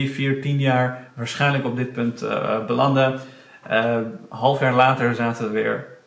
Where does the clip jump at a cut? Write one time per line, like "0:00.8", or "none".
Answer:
none